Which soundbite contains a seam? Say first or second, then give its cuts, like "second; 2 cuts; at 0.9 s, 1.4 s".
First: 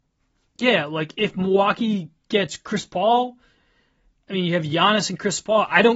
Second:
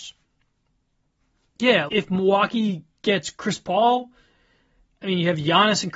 second; 1 cut; at 1.9 s